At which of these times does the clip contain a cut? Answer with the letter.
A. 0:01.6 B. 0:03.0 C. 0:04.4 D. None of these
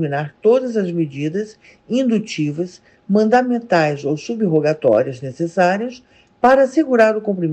B